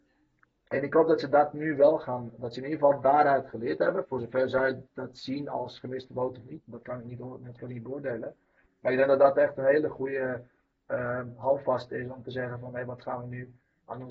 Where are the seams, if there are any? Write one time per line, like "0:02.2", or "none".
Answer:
none

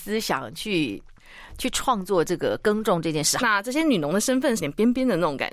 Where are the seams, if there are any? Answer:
0:03.4
0:04.6

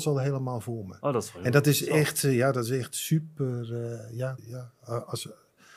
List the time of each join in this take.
0:04.4

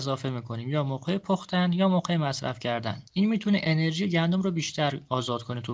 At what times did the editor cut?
0:03.1

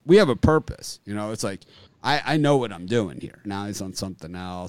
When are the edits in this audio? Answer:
0:03.4

